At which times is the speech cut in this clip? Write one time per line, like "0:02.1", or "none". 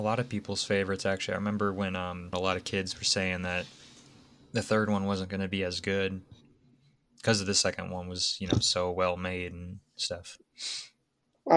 0:02.3